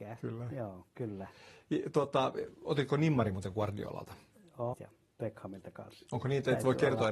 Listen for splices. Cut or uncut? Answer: cut